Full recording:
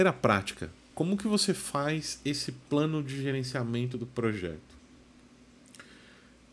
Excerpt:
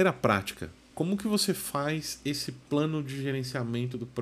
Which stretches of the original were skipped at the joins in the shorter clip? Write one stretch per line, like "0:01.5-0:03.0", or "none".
none